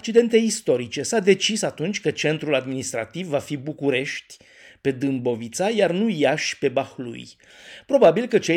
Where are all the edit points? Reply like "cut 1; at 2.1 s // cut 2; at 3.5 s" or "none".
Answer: none